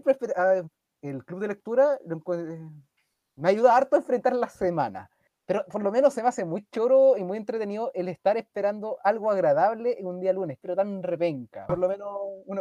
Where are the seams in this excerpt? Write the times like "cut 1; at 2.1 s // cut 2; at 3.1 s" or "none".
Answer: cut 1; at 5.3 s // cut 2; at 10.6 s // cut 3; at 11.7 s